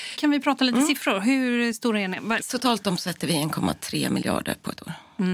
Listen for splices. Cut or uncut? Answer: cut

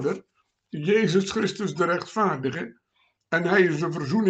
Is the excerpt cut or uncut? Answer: uncut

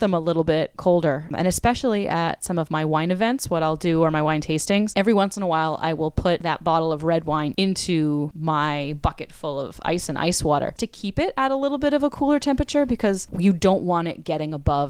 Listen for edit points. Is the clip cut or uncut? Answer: cut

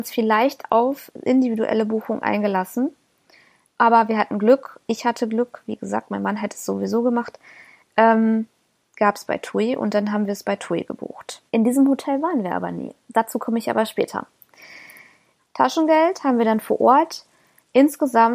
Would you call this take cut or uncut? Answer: cut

